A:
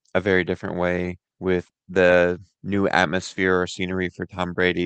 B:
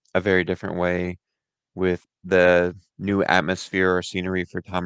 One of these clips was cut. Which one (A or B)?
A